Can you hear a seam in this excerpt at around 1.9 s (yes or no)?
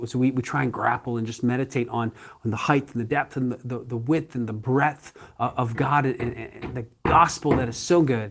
no